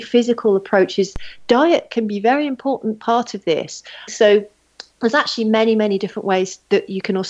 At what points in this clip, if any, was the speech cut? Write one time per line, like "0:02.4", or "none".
0:04.1